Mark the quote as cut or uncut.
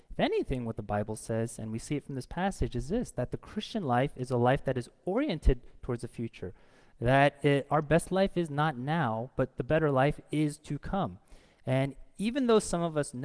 uncut